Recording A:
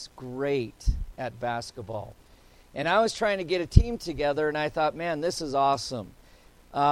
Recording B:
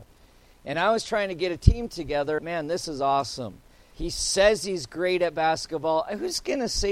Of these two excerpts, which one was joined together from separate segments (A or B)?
B